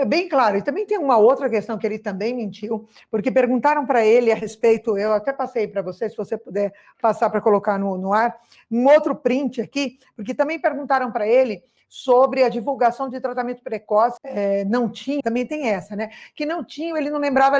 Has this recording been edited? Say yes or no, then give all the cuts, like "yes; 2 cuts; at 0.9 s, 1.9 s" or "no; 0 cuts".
yes; 2 cuts; at 14.2 s, 15.2 s